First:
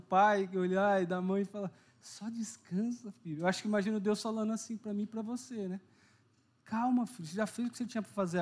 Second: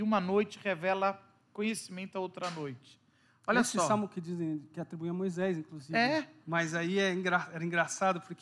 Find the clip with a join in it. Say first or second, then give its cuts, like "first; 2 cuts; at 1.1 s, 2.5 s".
second; 1 cut; at 6.4 s